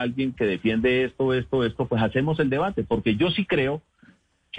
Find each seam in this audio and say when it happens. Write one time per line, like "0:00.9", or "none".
none